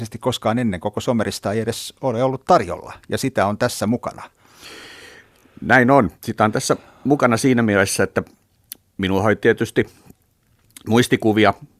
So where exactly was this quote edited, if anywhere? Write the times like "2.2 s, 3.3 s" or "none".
none